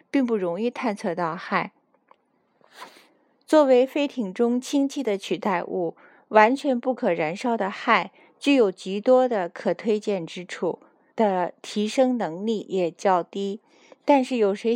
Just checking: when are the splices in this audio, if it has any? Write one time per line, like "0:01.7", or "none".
0:11.1